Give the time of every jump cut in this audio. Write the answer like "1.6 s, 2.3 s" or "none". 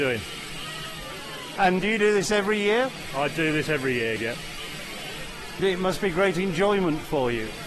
1.6 s, 4.2 s